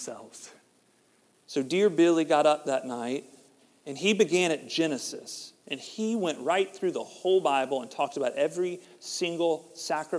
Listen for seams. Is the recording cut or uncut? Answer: cut